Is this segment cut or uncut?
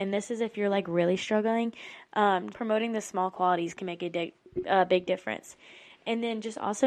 cut